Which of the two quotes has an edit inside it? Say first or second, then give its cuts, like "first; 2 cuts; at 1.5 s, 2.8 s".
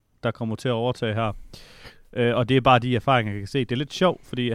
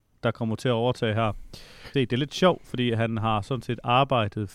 second; 1 cut; at 1.9 s